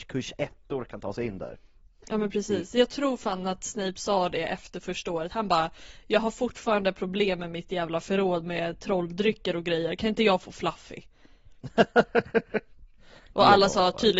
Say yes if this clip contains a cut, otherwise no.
yes